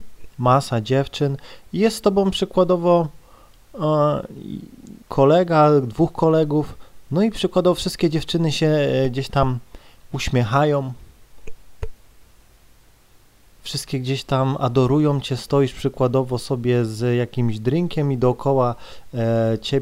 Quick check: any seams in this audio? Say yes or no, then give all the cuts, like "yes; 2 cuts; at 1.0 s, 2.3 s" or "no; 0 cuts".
yes; 2 cuts; at 5.0 s, 13.6 s